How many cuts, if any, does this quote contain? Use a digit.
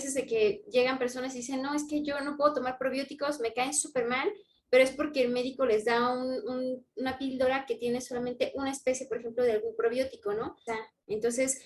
1